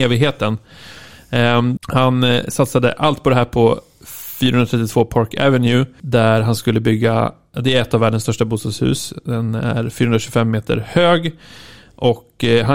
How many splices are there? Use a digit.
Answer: 1